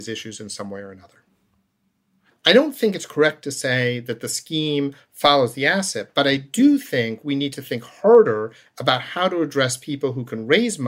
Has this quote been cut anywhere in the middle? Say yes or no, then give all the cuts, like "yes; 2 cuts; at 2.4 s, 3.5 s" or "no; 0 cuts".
yes; 1 cut; at 2.3 s